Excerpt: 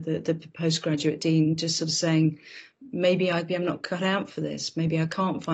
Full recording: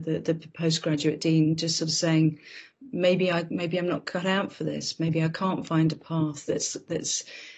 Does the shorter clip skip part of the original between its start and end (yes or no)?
yes